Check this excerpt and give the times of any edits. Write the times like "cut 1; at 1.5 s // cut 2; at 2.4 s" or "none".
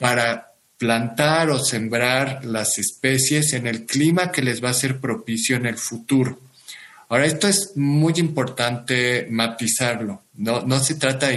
none